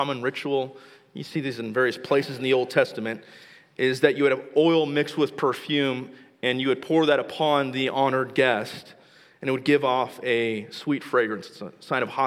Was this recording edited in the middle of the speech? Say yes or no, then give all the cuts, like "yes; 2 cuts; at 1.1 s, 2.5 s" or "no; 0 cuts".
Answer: no; 0 cuts